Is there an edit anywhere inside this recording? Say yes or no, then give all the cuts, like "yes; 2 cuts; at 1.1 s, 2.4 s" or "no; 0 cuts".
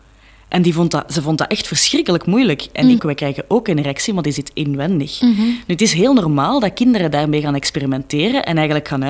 yes; 1 cut; at 3.0 s